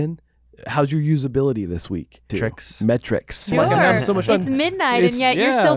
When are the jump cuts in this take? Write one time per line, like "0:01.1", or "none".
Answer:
0:02.3
0:03.5